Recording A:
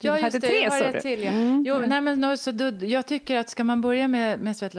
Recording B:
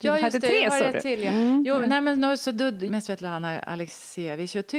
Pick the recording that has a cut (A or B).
B